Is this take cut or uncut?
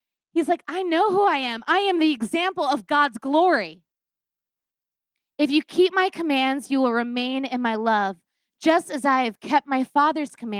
uncut